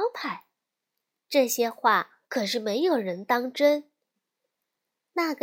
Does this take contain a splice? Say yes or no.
yes